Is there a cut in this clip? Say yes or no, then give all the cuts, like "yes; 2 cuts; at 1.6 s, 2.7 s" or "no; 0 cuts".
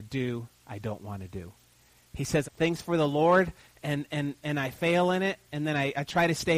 yes; 1 cut; at 2.4 s